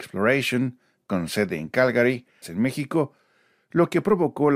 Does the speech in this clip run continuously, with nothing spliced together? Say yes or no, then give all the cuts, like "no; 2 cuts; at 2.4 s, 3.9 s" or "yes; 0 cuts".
no; 1 cut; at 2.4 s